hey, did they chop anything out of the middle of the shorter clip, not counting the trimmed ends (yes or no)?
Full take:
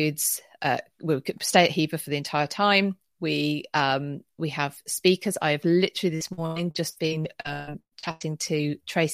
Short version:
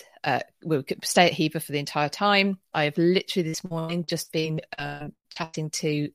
yes